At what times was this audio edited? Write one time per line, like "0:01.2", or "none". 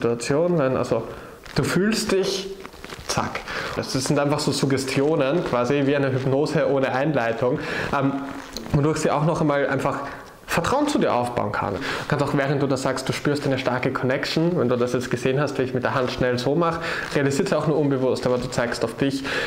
0:03.8
0:11.8